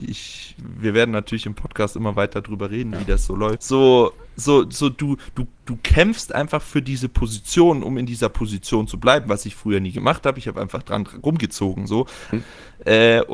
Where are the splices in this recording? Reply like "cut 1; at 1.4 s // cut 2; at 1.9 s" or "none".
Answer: cut 1; at 3.6 s // cut 2; at 12.3 s